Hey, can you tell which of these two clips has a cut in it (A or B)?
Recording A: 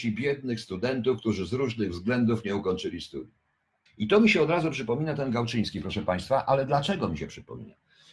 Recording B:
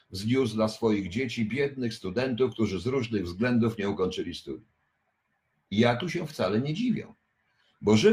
A